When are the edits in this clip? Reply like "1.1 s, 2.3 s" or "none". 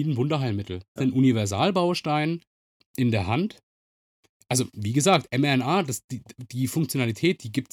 1.0 s